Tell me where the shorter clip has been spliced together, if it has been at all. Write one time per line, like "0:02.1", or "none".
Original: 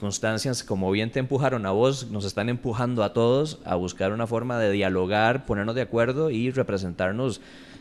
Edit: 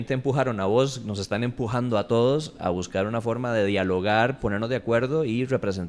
none

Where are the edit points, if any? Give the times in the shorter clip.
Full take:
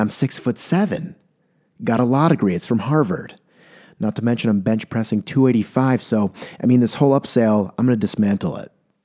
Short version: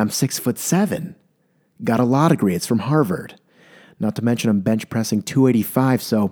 none

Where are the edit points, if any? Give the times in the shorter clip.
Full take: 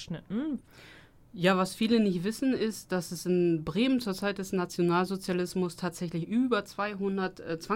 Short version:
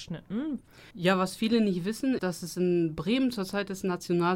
0:00.9
0:02.2

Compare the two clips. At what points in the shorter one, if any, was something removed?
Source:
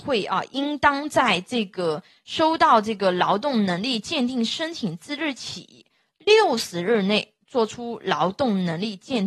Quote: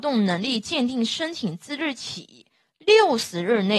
none

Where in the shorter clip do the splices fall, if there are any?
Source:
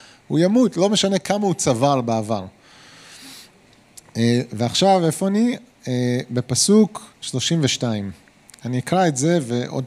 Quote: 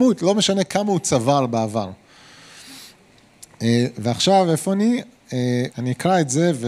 0:05.7

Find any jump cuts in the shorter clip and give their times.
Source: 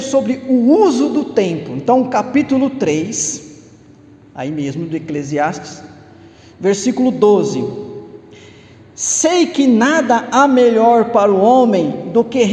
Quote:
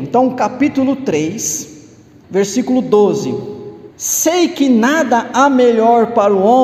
0:02.2
0:03.9

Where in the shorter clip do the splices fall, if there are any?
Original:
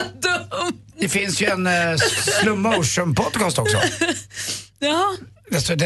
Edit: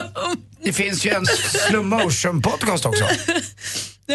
0:01.2

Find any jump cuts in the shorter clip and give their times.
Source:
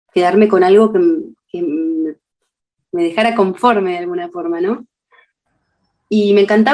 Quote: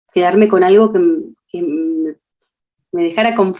none

